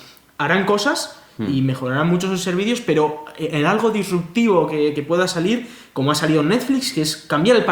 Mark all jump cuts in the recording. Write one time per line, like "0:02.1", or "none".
none

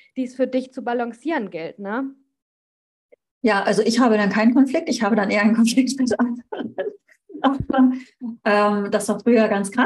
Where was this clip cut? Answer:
none

